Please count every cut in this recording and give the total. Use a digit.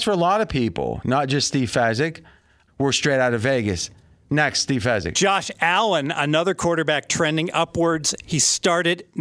1